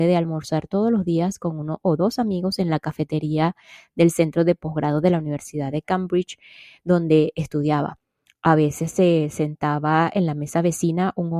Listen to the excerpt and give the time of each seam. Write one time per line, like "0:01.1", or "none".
none